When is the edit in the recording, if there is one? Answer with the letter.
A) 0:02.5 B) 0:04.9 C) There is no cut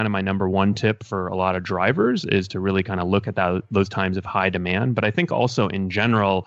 C